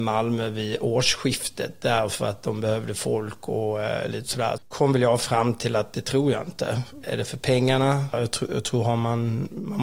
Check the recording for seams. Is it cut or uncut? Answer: cut